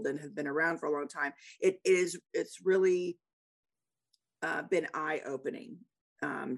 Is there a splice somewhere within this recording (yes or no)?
no